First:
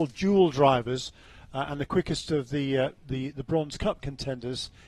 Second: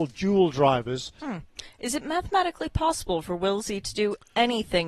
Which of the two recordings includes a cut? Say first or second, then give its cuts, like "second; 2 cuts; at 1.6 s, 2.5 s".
second; 1 cut; at 1.2 s